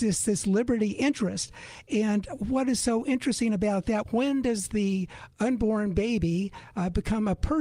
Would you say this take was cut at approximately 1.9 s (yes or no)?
no